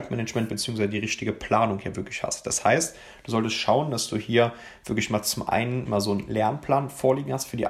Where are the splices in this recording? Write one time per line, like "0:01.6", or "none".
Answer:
0:05.8